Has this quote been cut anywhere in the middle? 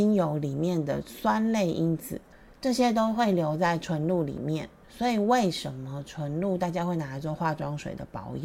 no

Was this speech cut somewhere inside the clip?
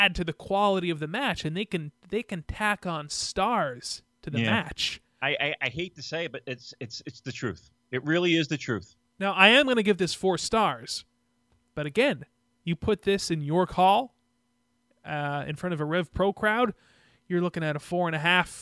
no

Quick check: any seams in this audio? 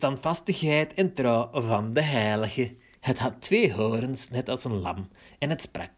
yes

